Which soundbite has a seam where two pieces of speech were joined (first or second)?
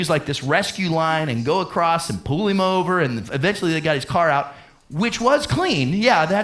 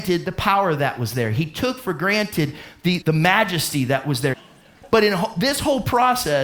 second